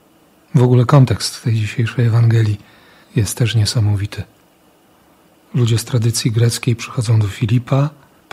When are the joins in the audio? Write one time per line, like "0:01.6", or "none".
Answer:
none